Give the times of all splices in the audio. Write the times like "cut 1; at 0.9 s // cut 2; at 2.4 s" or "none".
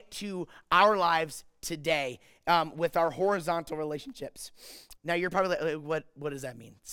cut 1; at 5.0 s